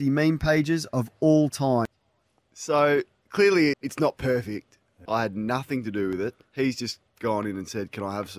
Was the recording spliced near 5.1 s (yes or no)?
yes